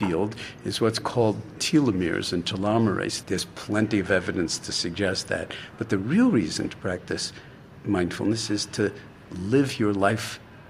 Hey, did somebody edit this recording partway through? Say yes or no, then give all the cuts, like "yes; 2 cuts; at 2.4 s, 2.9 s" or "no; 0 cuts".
yes; 1 cut; at 3.2 s